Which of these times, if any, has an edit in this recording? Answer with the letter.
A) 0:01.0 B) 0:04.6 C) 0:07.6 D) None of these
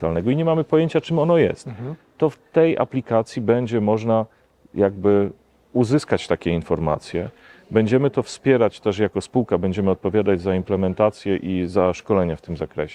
D